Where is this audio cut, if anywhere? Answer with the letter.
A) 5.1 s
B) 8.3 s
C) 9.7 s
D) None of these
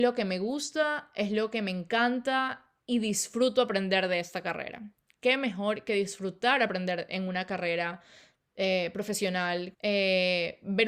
C